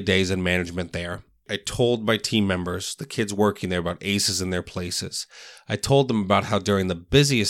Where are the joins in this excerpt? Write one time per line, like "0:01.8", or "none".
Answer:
none